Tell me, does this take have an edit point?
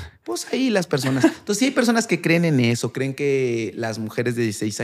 no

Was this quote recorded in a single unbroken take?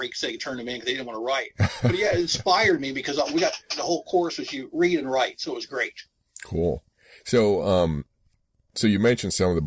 yes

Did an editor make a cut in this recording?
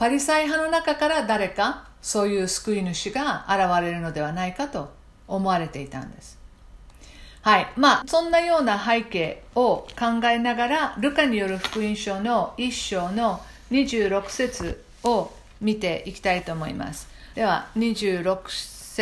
yes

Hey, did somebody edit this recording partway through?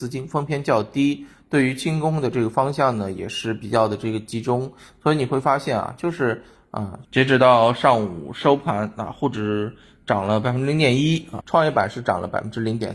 yes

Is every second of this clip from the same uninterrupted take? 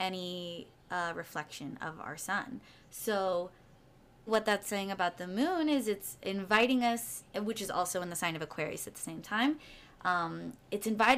no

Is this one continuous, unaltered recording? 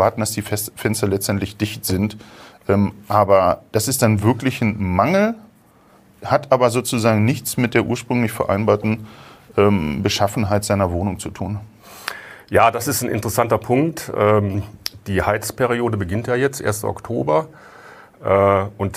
yes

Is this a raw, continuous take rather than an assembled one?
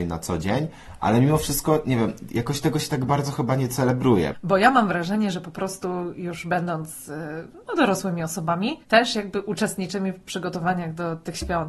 yes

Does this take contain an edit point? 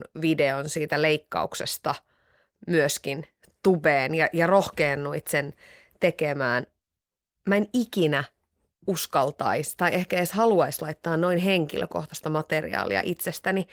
no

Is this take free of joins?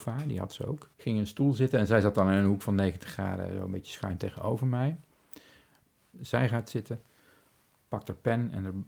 no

